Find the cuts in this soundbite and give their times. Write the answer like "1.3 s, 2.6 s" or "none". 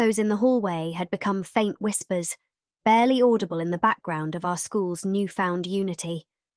none

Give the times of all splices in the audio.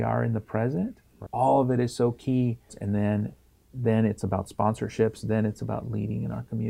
1.3 s, 2.7 s

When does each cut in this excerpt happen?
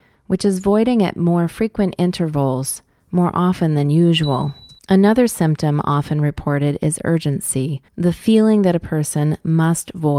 4.8 s, 7.9 s

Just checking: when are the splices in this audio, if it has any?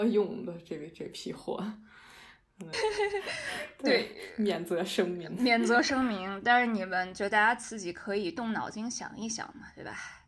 2.7 s

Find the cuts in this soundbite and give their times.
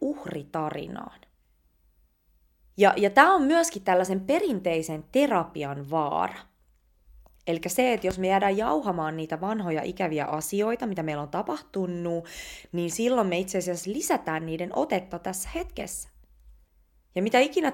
none

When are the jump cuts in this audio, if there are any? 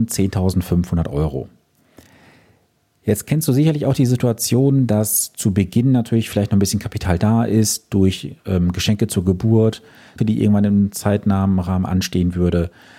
10.2 s

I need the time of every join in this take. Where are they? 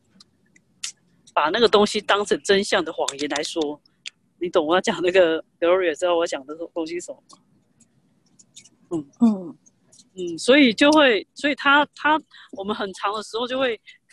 none

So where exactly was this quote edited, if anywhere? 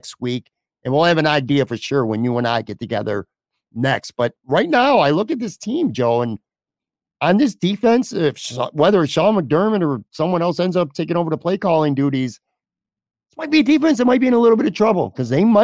none

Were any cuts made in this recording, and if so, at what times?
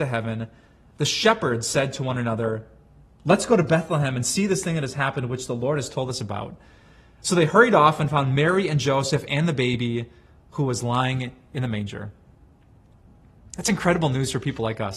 none

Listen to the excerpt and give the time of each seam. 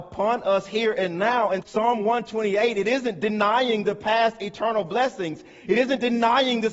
1.6 s

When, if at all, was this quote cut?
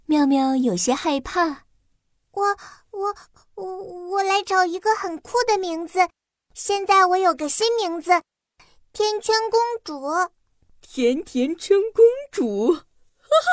8.9 s

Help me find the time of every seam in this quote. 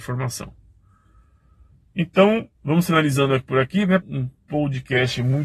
2.5 s, 4.0 s

